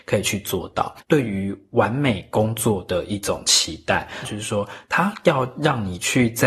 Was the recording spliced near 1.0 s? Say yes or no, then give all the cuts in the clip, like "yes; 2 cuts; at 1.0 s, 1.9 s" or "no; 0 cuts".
yes; 2 cuts; at 1.0 s, 4.2 s